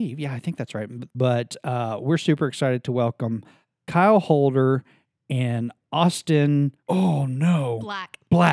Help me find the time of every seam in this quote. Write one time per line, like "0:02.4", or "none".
0:01.1
0:06.8